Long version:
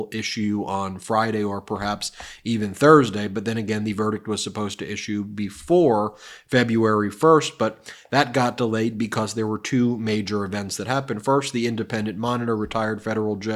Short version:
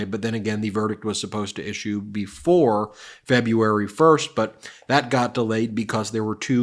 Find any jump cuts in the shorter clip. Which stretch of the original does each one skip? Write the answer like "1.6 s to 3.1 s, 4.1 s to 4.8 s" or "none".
none